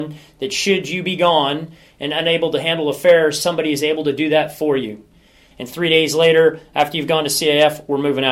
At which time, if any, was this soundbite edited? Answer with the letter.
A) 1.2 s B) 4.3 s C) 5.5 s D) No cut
C